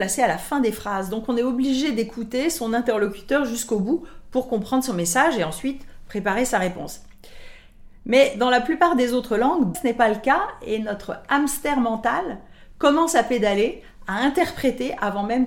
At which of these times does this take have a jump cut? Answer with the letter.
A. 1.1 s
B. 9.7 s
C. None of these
B